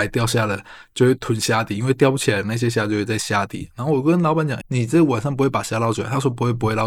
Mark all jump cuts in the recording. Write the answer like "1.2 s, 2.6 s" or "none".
4.6 s